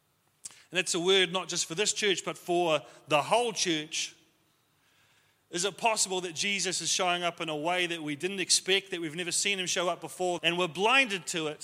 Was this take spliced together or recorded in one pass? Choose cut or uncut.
cut